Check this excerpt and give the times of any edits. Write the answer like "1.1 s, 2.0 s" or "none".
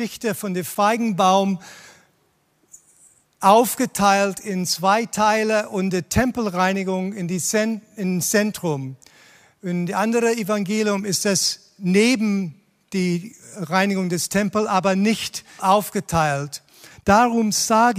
15.6 s, 16.9 s

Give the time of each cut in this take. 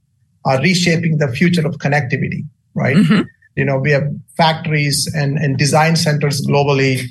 3.6 s

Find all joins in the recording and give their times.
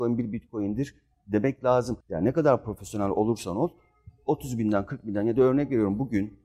2.0 s

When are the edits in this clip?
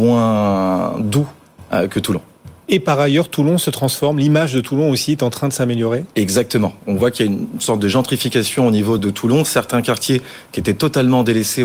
9.0 s

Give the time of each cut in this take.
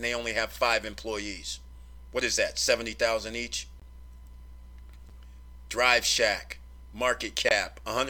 none

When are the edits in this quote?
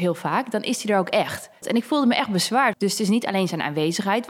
1.6 s, 2.7 s

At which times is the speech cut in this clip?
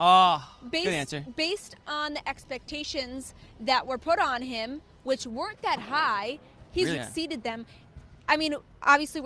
7.0 s

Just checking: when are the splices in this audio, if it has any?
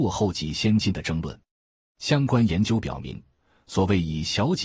none

